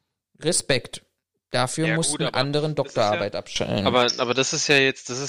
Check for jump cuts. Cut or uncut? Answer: uncut